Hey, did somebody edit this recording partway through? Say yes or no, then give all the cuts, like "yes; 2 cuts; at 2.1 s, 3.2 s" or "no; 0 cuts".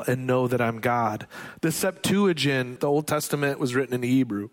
yes; 1 cut; at 2.8 s